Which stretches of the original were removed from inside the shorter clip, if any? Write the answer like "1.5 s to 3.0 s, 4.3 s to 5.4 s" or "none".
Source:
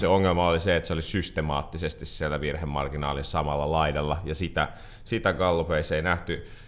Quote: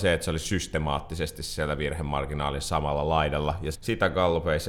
4.4 s to 5.0 s